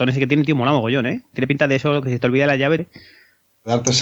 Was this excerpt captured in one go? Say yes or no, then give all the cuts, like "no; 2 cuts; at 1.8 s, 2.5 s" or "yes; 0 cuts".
no; 1 cut; at 2.8 s